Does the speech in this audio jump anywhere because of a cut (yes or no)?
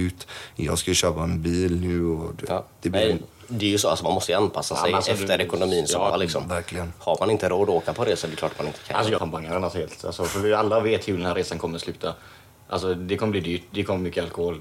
yes